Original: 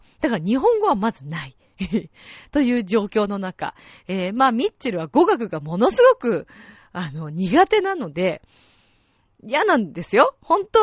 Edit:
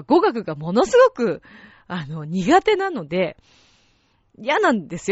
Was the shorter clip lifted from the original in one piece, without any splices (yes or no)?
yes